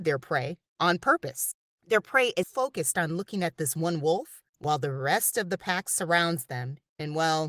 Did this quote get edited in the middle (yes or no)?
yes